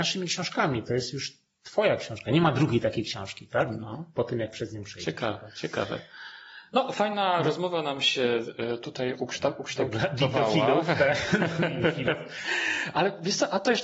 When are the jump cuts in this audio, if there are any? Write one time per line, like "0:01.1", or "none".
none

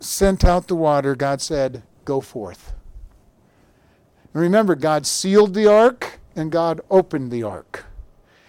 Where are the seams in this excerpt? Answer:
none

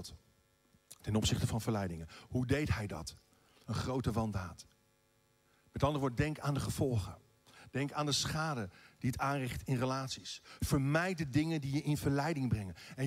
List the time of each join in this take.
0:03.6

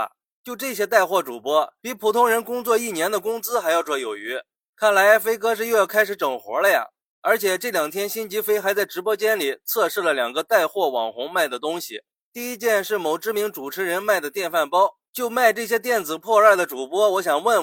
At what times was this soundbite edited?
0:01.8
0:03.8
0:15.1

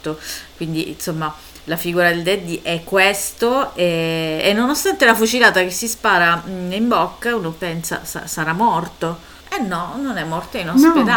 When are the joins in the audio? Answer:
0:09.4

